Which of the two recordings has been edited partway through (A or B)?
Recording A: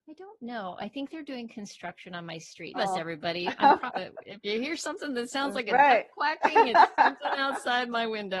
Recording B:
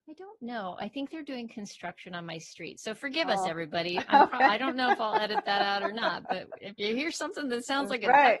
A